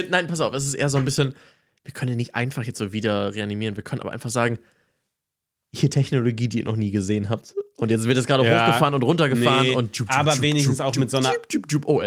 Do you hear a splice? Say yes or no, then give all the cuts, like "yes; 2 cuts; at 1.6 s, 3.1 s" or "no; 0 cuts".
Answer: no; 0 cuts